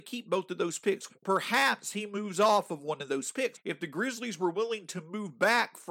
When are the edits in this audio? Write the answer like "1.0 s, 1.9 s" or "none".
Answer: 1.1 s, 3.5 s